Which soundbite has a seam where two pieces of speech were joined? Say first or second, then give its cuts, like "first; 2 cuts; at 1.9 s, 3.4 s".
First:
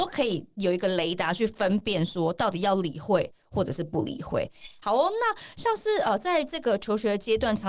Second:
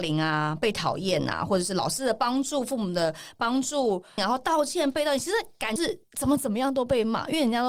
second; 2 cuts; at 4.2 s, 5.8 s